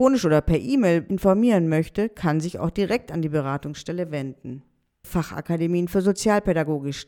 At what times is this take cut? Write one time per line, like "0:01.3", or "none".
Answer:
0:05.0